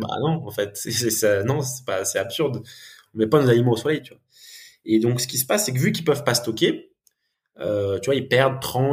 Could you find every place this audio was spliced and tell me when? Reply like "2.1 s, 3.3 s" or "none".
none